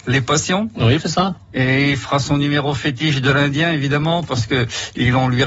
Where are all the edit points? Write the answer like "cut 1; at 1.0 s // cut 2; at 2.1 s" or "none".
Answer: cut 1; at 1.0 s